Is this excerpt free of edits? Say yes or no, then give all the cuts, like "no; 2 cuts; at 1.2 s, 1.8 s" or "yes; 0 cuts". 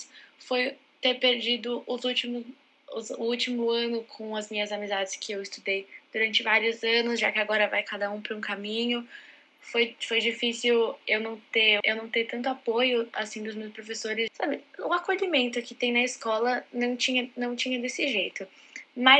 no; 2 cuts; at 11.8 s, 14.3 s